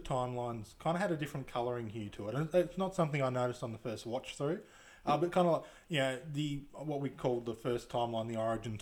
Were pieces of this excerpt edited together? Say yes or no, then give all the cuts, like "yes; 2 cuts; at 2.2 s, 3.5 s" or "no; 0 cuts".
no; 0 cuts